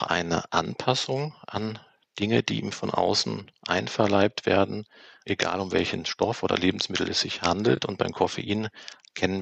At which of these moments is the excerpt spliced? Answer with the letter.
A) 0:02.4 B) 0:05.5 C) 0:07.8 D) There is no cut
D